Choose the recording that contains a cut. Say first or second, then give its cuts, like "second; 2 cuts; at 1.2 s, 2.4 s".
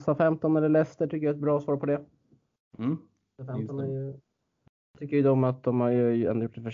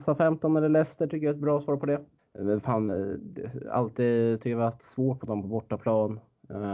second; 1 cut; at 2.2 s